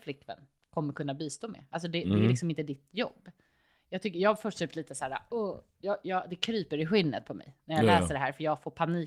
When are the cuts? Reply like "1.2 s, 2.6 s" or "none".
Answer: none